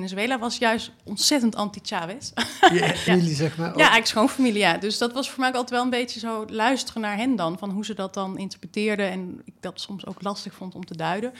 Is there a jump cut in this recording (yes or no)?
yes